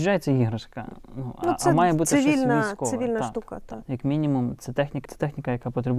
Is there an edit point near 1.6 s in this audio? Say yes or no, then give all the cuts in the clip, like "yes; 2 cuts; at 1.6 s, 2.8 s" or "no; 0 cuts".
no; 2 cuts; at 3.8 s, 5.1 s